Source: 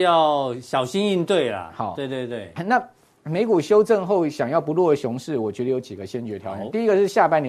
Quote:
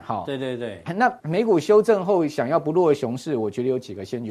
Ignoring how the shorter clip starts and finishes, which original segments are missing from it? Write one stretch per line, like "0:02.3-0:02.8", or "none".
0:02.9-0:03.2

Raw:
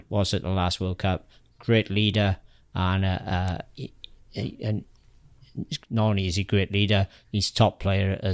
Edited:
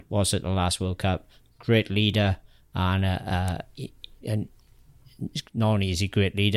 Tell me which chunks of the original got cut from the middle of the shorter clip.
0:04.2-0:04.6

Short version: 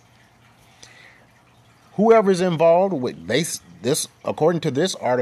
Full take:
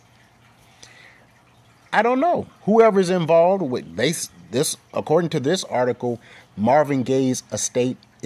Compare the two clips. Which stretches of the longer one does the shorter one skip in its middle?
0:01.8-0:02.5

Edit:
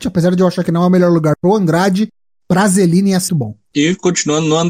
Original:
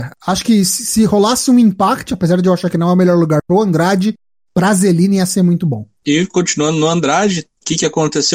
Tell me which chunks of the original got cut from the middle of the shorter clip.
0:05.3-0:05.6

